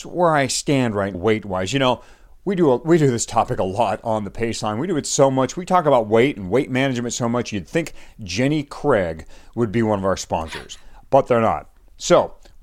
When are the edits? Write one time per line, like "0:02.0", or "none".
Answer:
0:01.1